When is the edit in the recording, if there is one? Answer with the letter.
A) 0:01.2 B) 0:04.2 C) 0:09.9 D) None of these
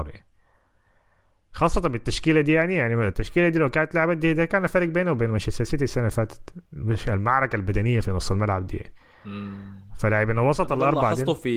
D